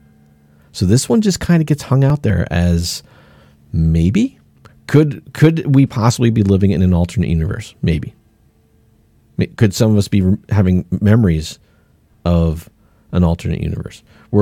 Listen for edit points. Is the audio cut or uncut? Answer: uncut